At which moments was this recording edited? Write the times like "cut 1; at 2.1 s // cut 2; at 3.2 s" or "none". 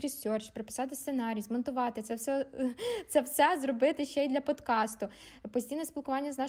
none